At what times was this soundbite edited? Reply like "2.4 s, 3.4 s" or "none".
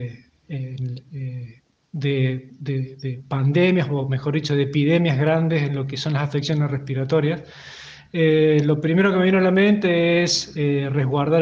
none